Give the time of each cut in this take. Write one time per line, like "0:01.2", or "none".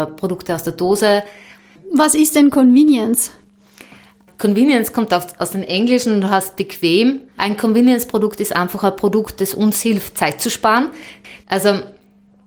0:07.3
0:11.4